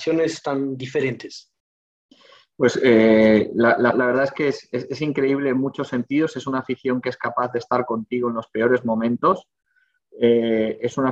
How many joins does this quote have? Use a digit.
1